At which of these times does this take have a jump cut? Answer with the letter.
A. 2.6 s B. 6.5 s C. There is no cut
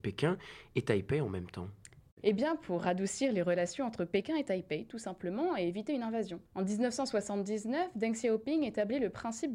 B